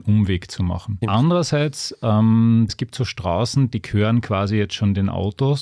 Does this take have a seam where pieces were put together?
yes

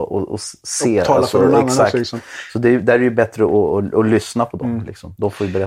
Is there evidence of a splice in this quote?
no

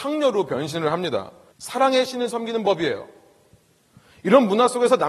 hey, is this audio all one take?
no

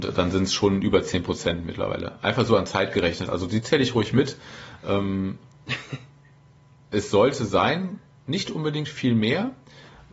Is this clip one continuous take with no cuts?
no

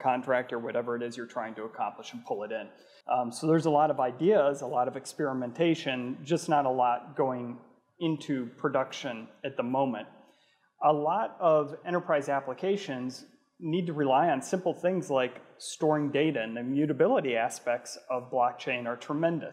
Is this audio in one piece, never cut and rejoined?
no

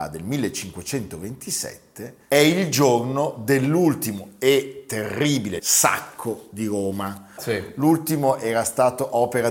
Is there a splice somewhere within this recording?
yes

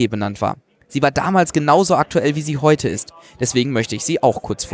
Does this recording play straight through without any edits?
yes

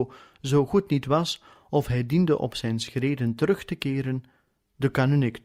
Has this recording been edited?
no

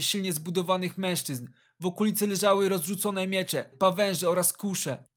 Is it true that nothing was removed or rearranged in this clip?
no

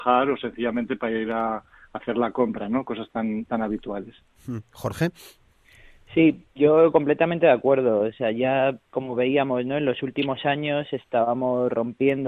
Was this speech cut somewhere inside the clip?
no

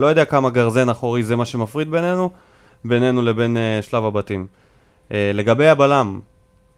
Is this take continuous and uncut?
yes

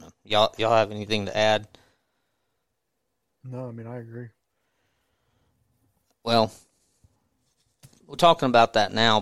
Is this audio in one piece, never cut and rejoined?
yes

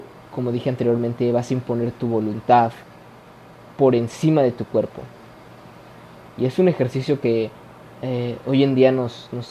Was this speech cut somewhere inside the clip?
no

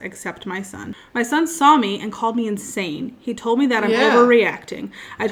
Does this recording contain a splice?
yes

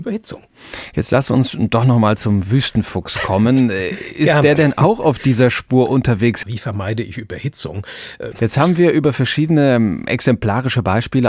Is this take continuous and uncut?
no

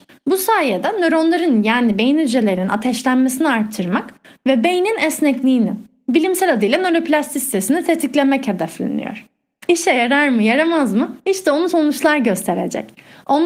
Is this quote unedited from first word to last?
yes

